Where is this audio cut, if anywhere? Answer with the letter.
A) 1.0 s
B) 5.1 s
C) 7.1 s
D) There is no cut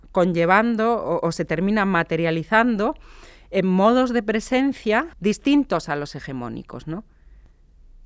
B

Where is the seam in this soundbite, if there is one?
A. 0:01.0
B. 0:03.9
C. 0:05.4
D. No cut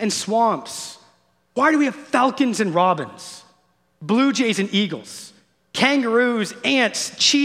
D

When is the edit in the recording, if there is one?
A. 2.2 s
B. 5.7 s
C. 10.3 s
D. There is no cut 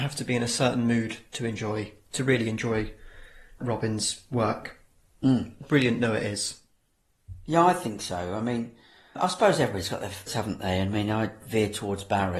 C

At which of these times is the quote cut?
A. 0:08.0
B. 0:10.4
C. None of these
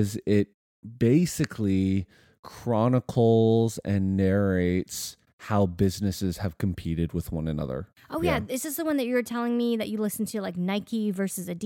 C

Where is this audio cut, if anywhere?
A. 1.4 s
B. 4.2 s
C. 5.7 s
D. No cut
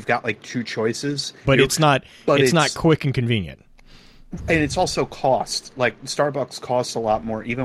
A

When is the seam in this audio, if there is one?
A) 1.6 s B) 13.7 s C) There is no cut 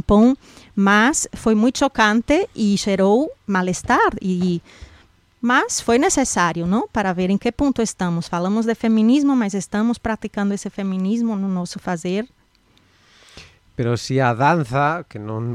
B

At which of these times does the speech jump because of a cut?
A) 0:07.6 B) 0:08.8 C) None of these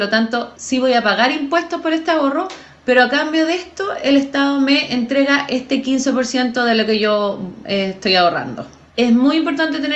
C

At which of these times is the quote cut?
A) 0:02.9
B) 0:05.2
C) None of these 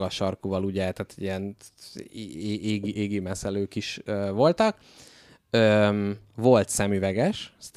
C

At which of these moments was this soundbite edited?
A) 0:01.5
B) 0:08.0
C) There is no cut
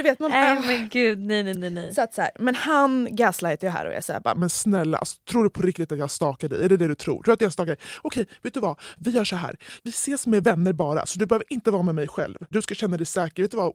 A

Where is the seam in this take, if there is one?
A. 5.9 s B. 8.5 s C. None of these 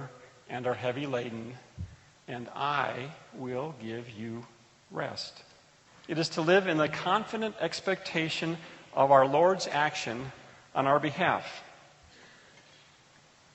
A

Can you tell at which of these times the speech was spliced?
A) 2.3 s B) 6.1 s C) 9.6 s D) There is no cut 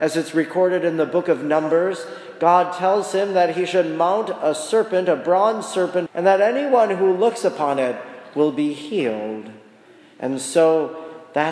B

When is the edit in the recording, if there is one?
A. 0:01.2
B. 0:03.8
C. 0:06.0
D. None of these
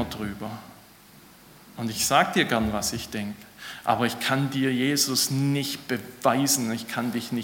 D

